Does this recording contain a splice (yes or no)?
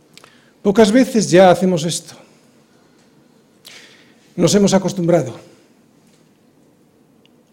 no